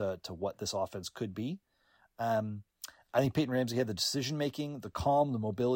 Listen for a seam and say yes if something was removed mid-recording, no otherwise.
no